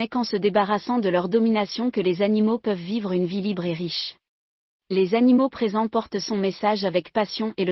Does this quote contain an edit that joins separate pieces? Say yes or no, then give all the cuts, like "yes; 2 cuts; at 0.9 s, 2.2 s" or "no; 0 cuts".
yes; 1 cut; at 4.7 s